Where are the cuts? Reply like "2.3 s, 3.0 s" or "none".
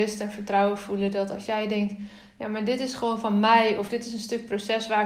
none